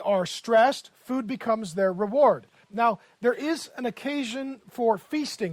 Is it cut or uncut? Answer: cut